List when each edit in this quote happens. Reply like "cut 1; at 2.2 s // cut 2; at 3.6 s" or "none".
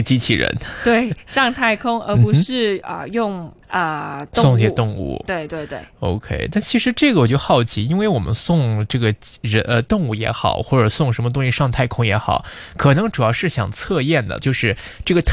cut 1; at 3.6 s // cut 2; at 14.4 s